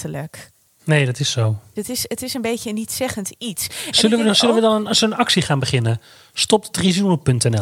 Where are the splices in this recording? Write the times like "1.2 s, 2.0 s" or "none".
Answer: 1.8 s